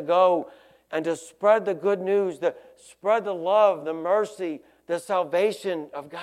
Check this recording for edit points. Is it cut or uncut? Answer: uncut